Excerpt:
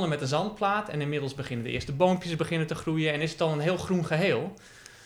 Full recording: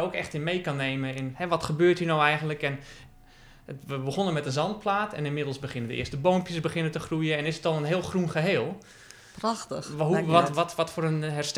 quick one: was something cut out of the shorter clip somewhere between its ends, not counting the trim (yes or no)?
no